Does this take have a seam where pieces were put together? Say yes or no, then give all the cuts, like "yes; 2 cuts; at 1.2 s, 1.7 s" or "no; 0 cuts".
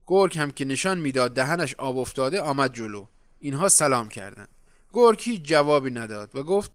no; 0 cuts